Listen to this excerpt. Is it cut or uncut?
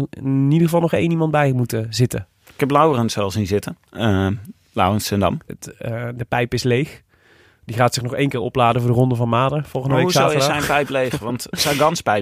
cut